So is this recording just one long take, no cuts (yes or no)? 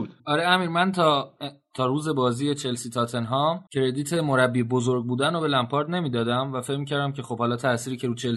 yes